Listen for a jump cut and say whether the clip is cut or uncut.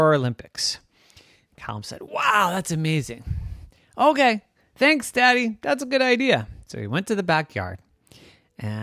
uncut